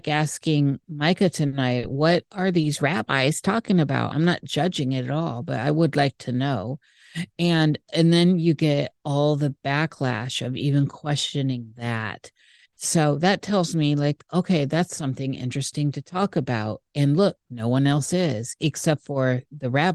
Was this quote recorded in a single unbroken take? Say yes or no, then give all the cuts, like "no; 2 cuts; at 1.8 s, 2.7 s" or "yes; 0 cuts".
no; 1 cut; at 4.1 s